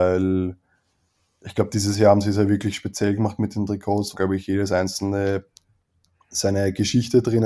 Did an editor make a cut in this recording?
yes; 1 cut; at 4.1 s

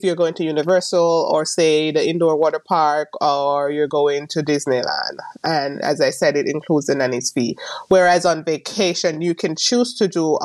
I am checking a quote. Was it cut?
no; 0 cuts

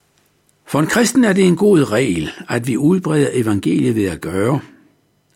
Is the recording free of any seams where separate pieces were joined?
yes; 0 cuts

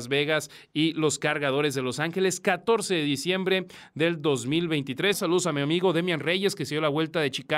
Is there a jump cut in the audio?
yes; 1 cut; at 5.1 s

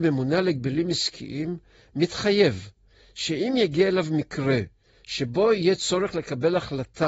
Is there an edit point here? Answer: no; 0 cuts

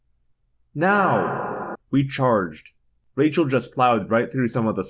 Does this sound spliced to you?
yes; 1 cut; at 1.9 s

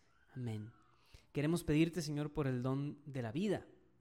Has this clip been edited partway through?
no; 0 cuts

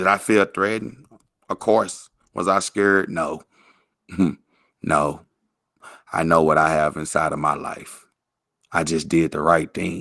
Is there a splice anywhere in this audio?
no; 0 cuts

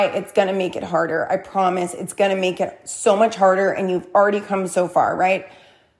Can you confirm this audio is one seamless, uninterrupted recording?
yes; 0 cuts

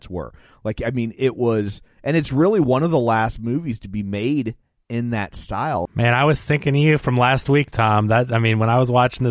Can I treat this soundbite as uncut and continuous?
no; 1 cut; at 5.9 s

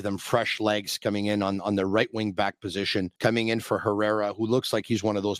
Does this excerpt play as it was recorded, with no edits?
no; 1 cut; at 3.2 s

